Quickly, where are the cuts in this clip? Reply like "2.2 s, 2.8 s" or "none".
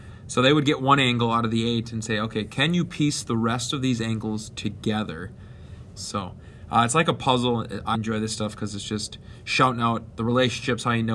6.0 s, 7.9 s